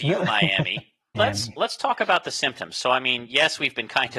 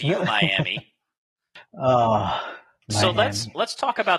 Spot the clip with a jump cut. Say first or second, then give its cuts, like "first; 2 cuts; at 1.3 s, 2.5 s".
first; 1 cut; at 1.1 s